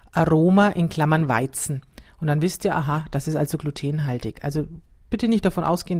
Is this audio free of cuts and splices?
yes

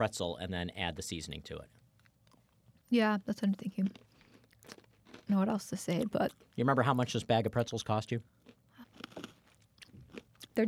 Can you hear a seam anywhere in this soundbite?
yes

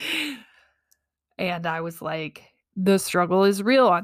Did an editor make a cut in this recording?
no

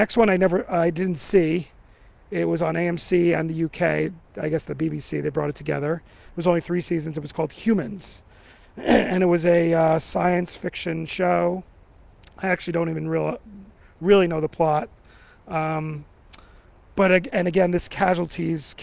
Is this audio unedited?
yes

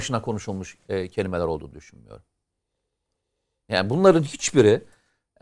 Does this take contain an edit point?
no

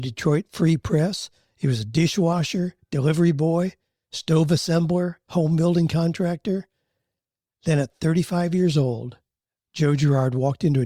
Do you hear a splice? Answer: no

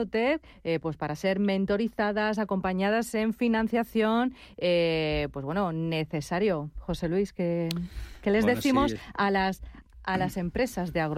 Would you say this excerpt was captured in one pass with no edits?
yes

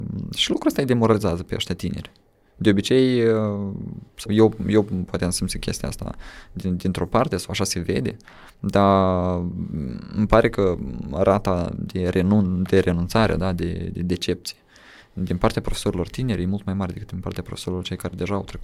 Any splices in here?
yes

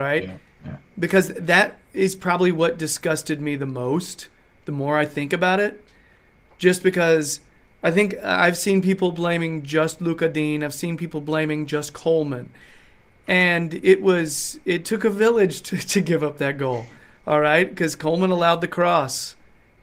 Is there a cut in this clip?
no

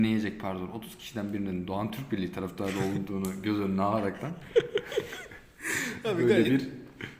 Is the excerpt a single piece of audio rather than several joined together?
yes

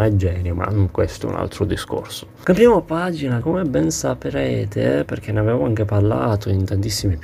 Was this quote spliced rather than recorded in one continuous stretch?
yes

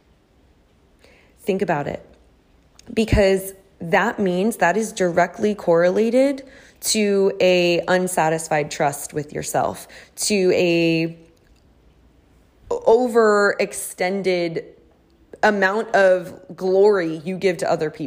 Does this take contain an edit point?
no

